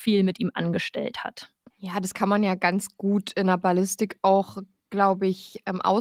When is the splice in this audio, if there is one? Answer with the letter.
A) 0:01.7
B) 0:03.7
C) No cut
A